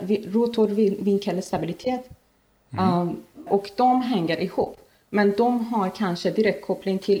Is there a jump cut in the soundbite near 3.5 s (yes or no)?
yes